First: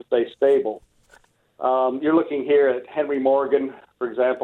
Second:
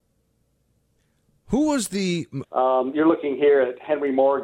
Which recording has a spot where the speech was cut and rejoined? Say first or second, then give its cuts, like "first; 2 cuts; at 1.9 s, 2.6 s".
second; 1 cut; at 2.4 s